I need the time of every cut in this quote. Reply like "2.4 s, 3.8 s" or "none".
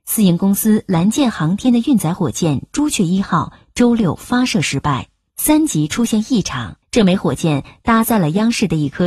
5.3 s, 6.8 s